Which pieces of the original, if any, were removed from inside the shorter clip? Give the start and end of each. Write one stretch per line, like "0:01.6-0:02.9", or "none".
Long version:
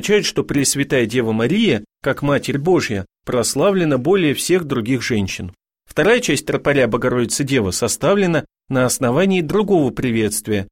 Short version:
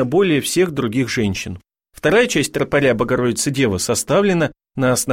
none